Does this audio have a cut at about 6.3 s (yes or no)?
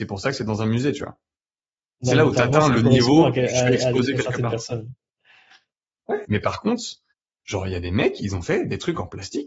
yes